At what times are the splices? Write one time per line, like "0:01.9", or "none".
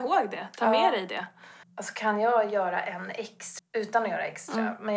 0:01.6
0:03.6